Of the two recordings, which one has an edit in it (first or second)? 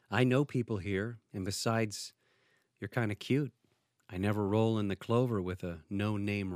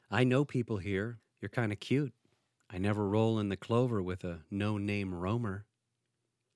second